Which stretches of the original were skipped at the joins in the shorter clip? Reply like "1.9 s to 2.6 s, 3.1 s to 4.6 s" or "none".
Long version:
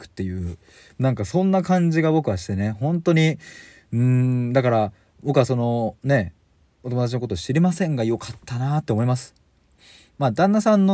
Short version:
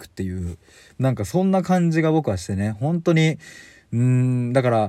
none

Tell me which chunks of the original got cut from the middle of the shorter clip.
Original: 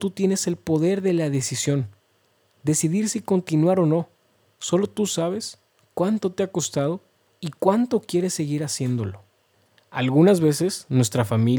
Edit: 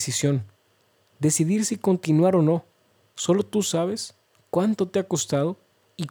none

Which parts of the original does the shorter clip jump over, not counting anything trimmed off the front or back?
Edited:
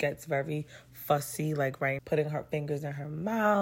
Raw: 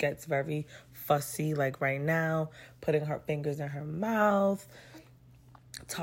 2.0 s to 2.7 s

